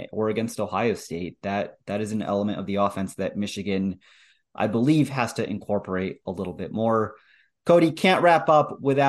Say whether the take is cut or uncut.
uncut